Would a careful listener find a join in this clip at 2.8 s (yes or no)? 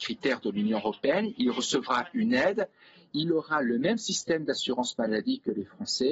no